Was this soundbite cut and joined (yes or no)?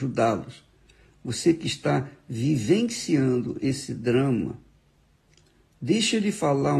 no